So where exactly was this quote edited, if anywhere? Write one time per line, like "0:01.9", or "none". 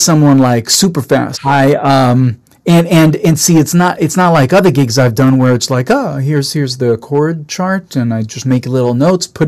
0:01.3